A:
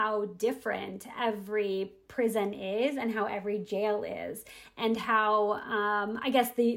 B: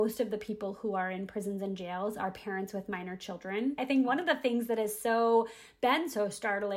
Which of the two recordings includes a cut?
B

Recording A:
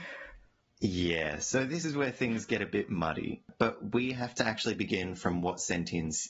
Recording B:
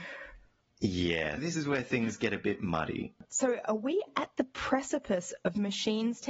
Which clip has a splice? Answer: B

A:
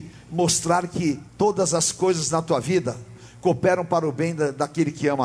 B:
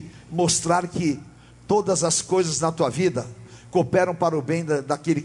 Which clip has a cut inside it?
A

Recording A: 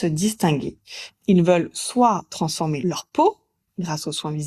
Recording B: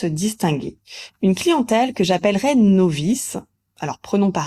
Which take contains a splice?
A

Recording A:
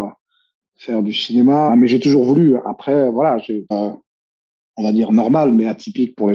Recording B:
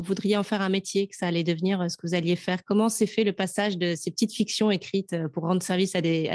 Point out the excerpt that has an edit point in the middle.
A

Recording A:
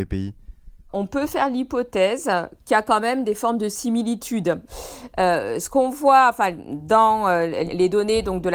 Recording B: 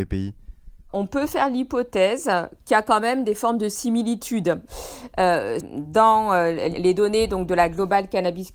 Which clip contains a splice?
B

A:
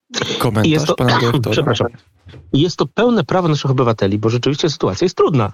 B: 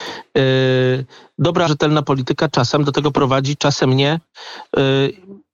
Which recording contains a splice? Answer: B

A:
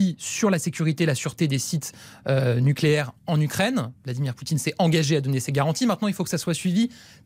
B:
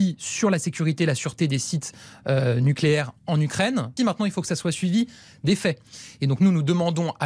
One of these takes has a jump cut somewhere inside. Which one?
B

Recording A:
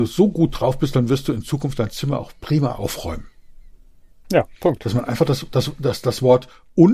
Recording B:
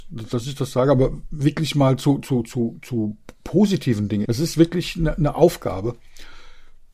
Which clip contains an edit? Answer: B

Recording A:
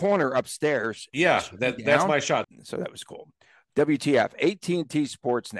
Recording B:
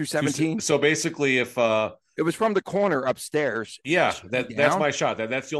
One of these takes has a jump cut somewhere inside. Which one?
A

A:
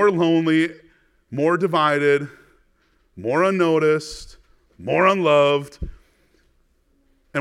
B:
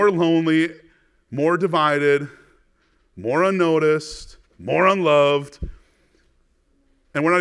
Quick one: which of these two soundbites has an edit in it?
B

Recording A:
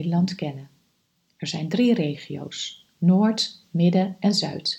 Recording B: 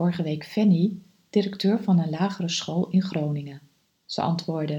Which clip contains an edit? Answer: B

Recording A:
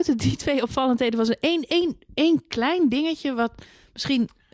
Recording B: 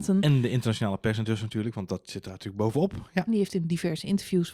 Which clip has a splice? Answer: B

